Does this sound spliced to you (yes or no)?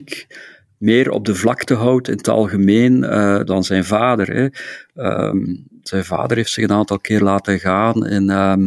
yes